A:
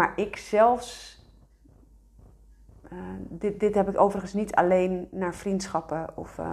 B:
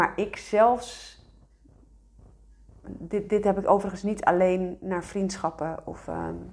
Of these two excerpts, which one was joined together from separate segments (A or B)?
B